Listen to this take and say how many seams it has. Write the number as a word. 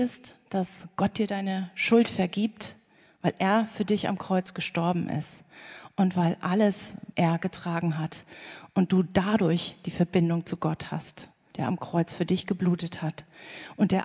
two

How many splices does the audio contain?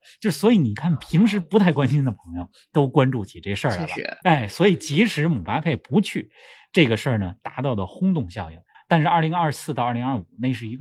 two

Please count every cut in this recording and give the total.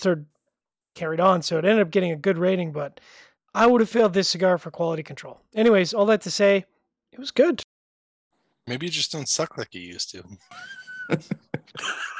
zero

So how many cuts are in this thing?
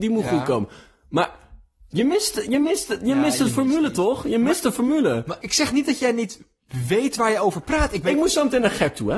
one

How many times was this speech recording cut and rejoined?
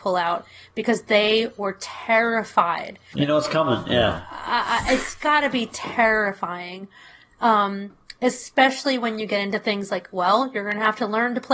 one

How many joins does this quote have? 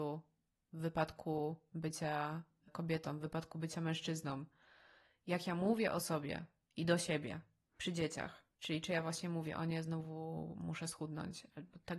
one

